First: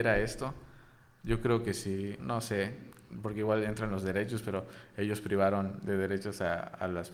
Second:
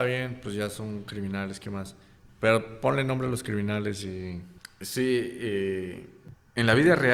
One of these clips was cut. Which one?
first; 1 cut; at 2.2 s

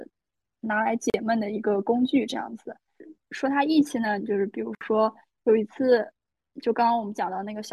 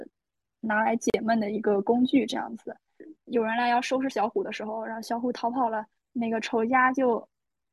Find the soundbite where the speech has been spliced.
second; 1 cut; at 3.2 s

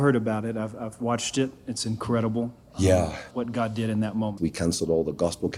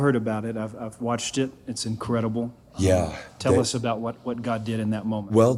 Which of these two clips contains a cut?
first; 2 cuts; at 3.3 s, 4.4 s

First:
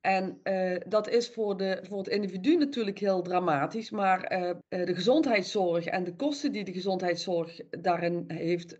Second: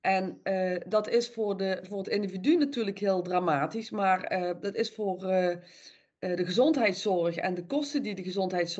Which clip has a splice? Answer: first; 1 cut; at 4.6 s

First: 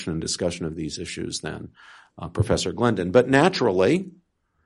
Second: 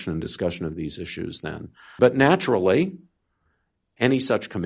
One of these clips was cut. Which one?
second; 1 cut; at 2.0 s

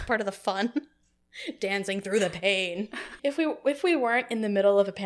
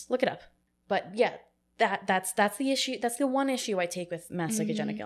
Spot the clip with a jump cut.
first; 1 cut; at 3.2 s

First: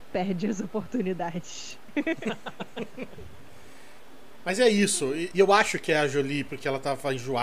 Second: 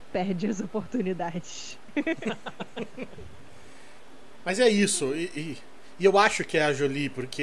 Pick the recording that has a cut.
first; 2 cuts; at 5.3 s, 6.5 s

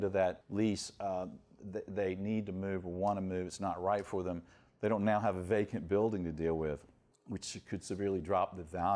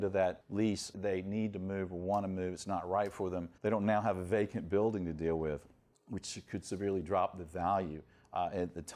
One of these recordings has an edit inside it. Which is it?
second; 2 cuts; at 0.9 s, 3.6 s

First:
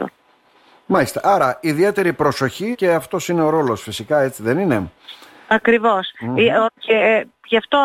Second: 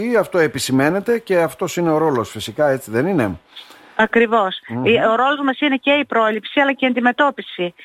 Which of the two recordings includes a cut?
first; 2 cuts; at 2.7 s, 6.7 s

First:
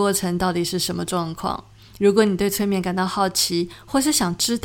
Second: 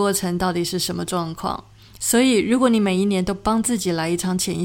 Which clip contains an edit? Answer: second; 1 cut; at 2.0 s

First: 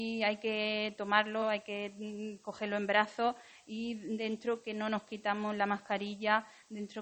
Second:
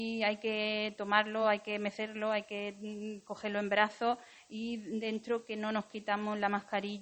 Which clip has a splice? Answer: first; 1 cut; at 1.4 s

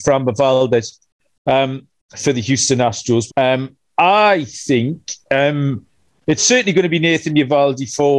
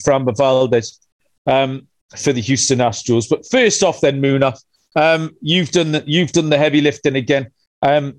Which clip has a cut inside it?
first; 2 cuts; at 3.3 s, 6.4 s

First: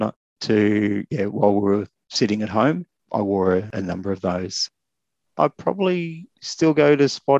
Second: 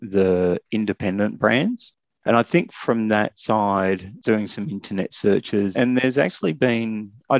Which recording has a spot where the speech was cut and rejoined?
second; 2 cuts; at 4.2 s, 5.7 s

